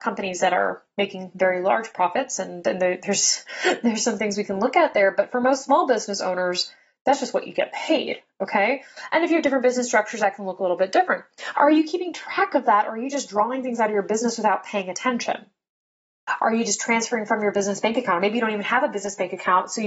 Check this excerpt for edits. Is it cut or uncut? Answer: cut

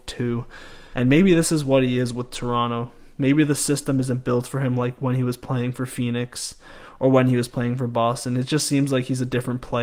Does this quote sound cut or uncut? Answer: cut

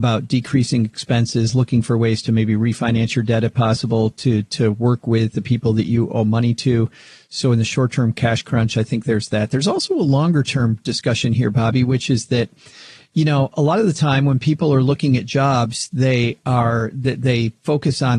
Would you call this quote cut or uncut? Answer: uncut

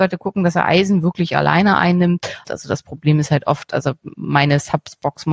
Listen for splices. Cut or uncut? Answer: cut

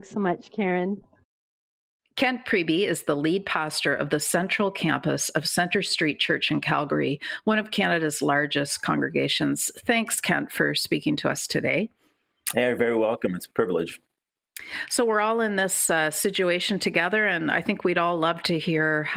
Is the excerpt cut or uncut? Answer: uncut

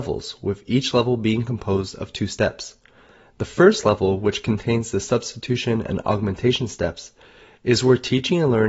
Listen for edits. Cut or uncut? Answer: uncut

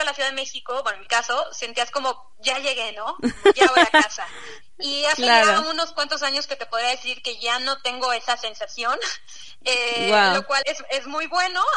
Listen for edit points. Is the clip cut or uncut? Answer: cut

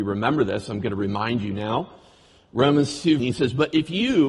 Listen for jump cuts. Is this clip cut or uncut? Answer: cut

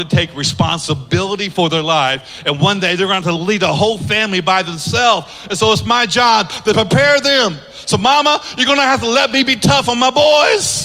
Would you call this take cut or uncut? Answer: uncut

